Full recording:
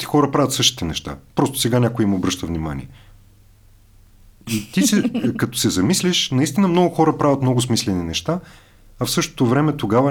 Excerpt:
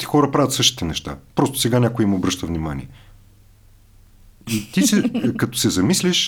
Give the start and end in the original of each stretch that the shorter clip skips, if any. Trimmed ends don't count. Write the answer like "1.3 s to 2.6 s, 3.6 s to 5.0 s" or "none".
none